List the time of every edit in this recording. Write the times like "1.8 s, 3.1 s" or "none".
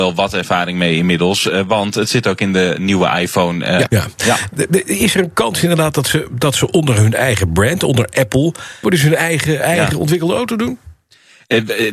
3.9 s, 8.8 s